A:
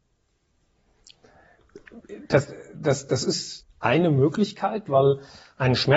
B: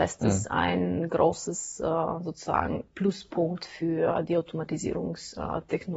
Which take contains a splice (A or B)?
A